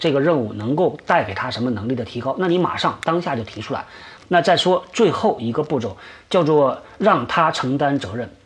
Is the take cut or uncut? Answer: cut